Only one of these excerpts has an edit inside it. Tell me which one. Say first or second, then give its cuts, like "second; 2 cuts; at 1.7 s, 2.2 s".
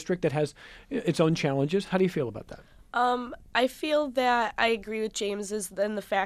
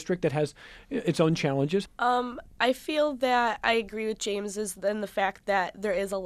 second; 1 cut; at 1.9 s